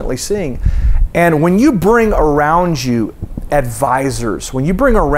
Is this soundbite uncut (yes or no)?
no